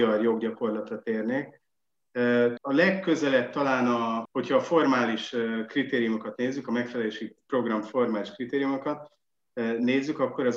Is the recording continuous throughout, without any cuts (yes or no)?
no